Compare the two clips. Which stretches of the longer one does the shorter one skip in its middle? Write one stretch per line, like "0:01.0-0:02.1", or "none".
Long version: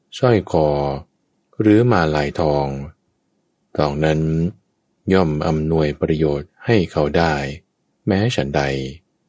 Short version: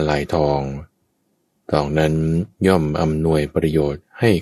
0:04.6-0:05.0